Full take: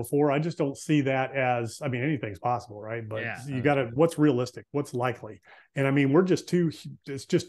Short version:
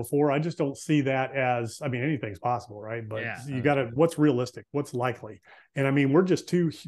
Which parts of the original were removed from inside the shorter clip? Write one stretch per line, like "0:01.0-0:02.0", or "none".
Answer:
none